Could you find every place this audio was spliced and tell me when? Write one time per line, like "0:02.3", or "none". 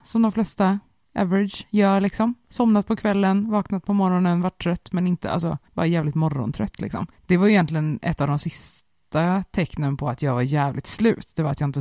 none